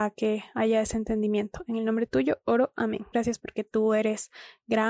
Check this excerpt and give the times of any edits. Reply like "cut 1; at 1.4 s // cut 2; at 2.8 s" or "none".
cut 1; at 3.1 s